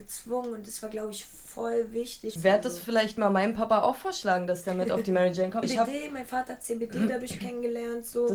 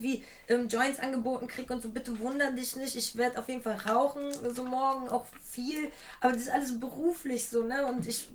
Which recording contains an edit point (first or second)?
first